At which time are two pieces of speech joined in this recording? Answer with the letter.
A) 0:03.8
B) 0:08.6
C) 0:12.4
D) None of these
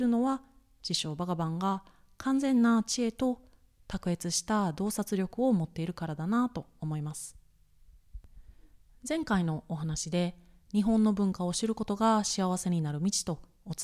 D